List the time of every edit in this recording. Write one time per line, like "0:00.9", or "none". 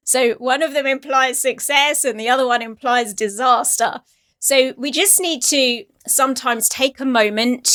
none